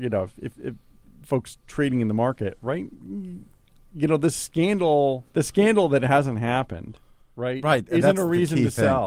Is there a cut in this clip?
yes; 1 cut; at 5.3 s

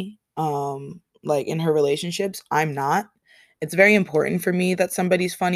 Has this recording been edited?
no; 0 cuts

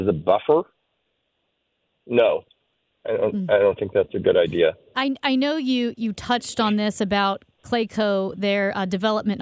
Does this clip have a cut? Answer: no; 0 cuts

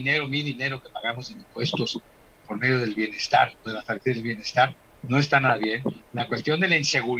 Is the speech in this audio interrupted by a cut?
yes; 1 cut; at 3.6 s

